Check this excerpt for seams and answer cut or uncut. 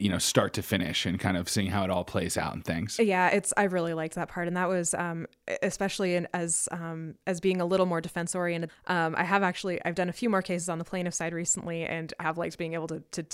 cut